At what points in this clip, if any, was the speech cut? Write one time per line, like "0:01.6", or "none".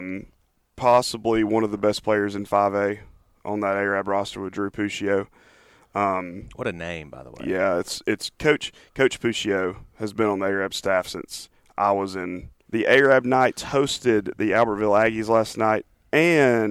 0:12.7